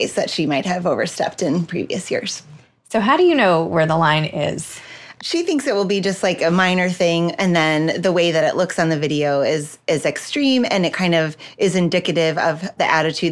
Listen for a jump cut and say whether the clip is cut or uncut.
cut